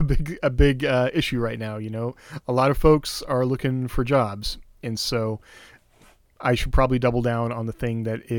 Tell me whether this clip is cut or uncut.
uncut